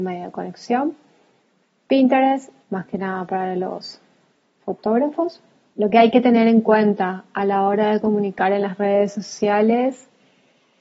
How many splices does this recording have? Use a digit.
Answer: 2